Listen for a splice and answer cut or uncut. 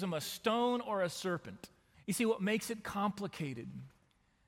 cut